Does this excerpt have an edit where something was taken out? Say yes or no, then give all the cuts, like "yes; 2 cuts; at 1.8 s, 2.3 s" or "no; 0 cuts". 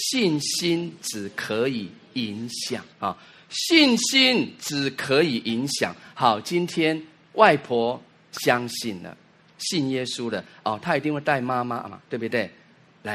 yes; 1 cut; at 2.9 s